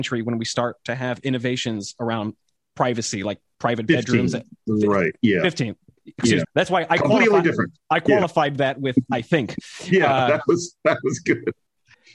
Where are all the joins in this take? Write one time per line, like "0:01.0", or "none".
0:06.4

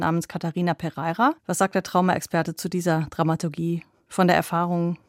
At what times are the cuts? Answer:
0:01.4

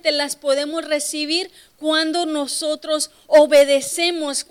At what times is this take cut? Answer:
none

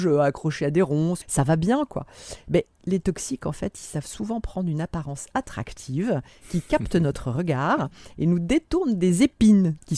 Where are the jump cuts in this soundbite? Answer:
0:01.2

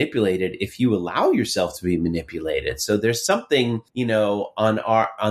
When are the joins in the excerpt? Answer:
0:03.9

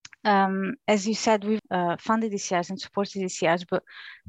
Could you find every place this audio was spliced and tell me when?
0:01.6

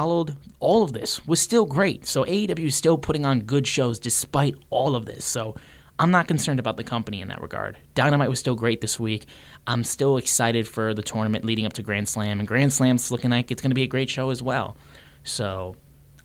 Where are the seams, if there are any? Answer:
none

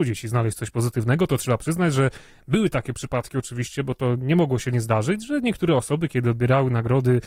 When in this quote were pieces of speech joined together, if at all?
none

